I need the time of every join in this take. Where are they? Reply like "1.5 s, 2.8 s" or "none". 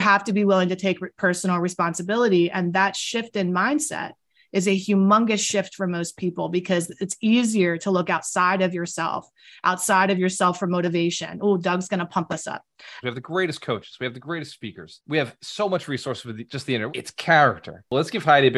13.0 s, 16.9 s